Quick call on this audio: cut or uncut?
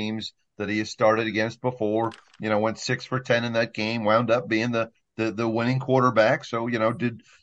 uncut